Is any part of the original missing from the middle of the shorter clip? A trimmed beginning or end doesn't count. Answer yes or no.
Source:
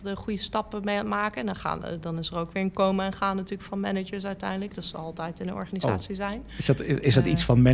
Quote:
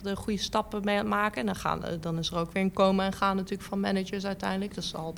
no